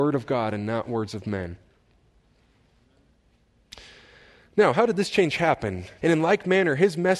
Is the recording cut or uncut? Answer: cut